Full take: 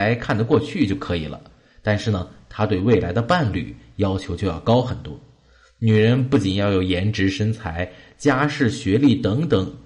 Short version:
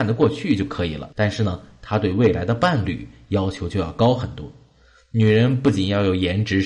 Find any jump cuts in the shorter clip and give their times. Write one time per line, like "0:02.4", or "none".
0:01.1